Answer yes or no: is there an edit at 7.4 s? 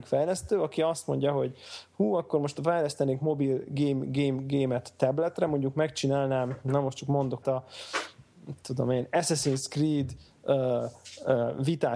yes